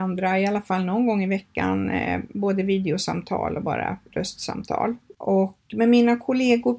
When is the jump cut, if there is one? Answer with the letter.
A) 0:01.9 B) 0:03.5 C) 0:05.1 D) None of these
C